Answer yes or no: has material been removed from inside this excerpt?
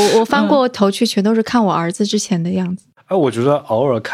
no